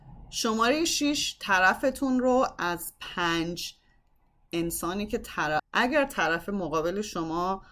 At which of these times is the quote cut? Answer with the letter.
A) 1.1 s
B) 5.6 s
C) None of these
B